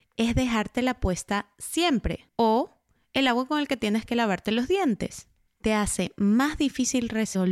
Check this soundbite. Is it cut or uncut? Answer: cut